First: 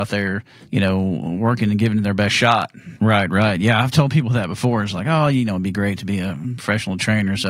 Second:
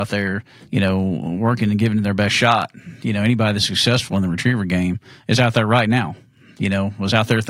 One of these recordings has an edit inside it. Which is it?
first; 1 cut; at 3.0 s

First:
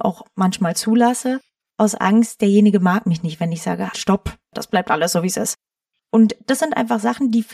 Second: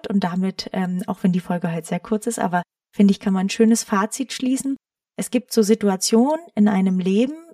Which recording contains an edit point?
first; 1 cut; at 3.9 s

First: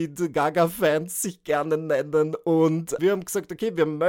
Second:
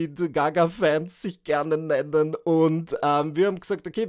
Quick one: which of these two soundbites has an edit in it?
first; 1 cut; at 3.0 s

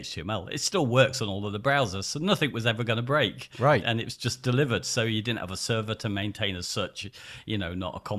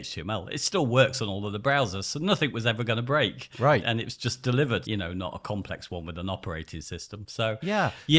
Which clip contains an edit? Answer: second; 1 cut; at 4.8 s

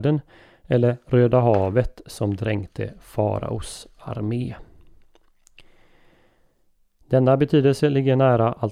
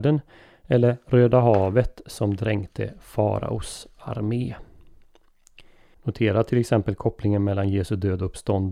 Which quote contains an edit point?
second; 1 cut; at 5.9 s

